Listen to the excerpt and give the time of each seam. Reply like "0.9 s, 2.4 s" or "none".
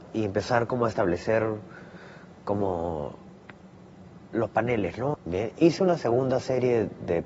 5.1 s